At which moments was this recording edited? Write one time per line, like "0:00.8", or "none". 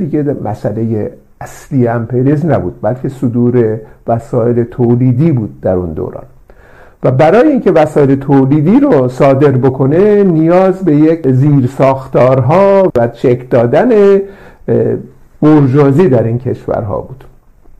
0:12.9